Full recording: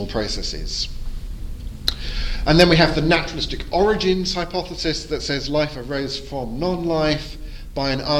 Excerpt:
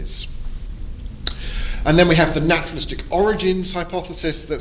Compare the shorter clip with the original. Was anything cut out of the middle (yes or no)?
no